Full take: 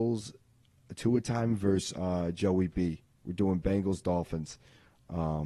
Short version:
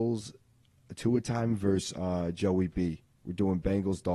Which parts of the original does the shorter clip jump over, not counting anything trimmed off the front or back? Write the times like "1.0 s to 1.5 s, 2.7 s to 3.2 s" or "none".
none